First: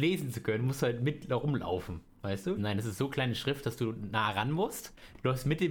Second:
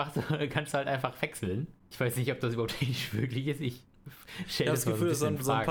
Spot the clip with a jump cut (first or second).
first